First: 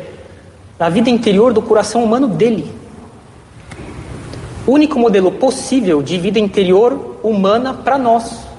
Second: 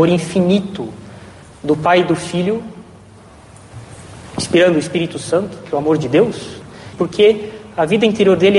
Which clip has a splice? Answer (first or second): second